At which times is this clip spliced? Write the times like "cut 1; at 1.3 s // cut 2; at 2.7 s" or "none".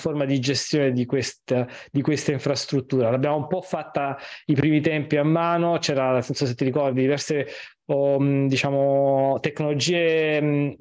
none